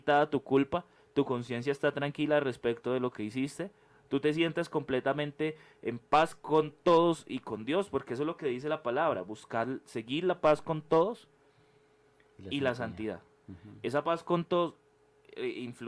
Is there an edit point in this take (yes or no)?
no